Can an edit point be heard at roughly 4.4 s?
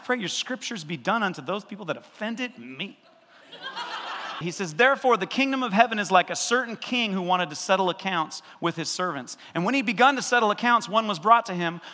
yes; 1 cut; at 4.4 s

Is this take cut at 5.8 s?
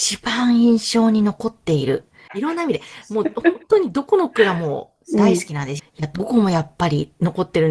yes; 2 cuts; at 2.3 s, 5.8 s

